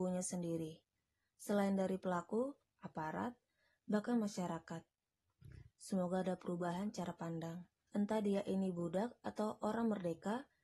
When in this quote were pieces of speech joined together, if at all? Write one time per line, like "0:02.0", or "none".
0:02.6
0:05.7
0:07.9